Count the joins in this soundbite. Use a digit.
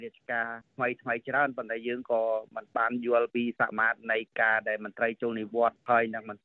1